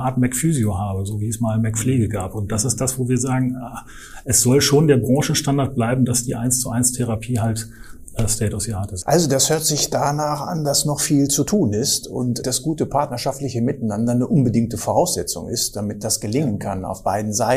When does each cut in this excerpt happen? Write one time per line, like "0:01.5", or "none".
0:09.0
0:12.4